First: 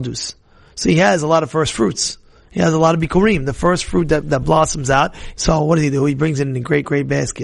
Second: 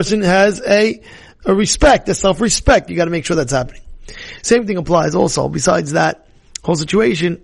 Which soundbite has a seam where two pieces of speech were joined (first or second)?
first